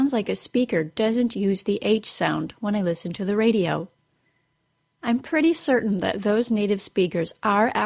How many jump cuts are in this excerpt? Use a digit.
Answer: 0